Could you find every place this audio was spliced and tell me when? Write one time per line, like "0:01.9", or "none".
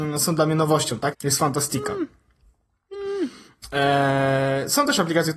0:01.1